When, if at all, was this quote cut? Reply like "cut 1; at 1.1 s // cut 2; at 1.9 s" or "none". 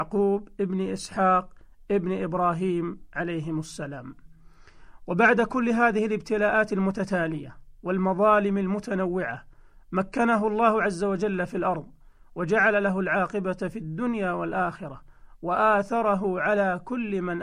none

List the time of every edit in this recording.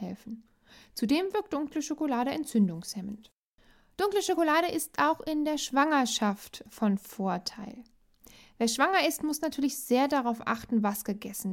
none

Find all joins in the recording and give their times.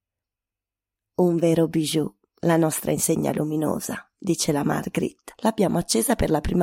cut 1; at 5.4 s

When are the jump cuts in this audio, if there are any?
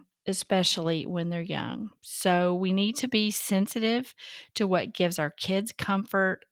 cut 1; at 2.0 s

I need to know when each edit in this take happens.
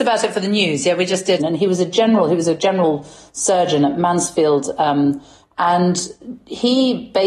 cut 1; at 1.4 s // cut 2; at 5.4 s

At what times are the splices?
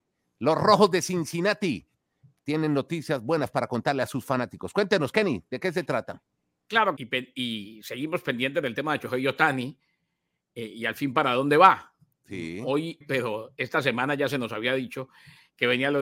cut 1; at 6.9 s // cut 2; at 13.0 s

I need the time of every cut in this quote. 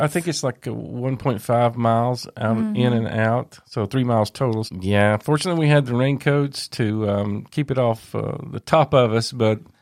cut 1; at 4.7 s

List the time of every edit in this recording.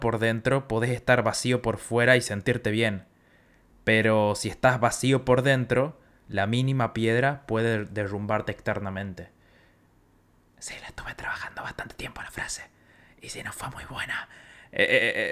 none

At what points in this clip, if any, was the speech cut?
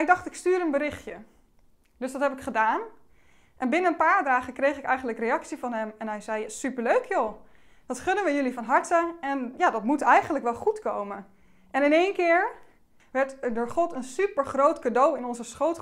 cut 1; at 13.0 s

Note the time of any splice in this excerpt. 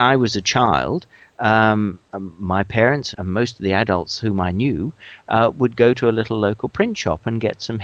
cut 1; at 3.1 s

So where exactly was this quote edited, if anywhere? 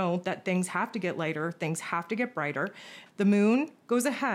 cut 1; at 3.1 s

